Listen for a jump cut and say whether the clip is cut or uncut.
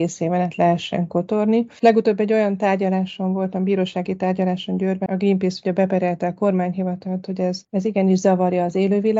cut